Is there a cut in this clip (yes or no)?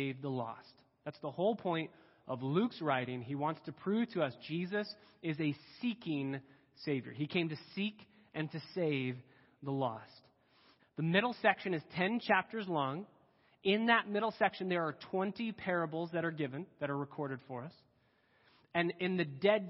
yes